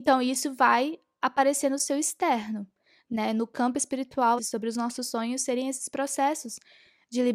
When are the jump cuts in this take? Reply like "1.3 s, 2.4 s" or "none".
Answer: 4.4 s